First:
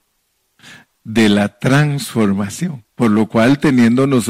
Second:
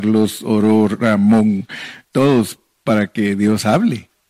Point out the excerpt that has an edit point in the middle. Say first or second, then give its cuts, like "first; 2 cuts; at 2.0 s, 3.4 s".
second; 1 cut; at 2.0 s